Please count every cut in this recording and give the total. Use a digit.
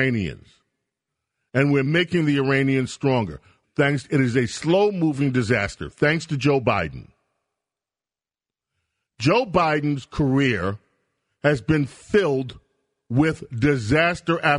1